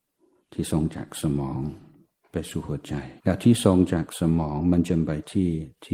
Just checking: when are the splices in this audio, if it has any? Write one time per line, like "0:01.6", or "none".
0:03.2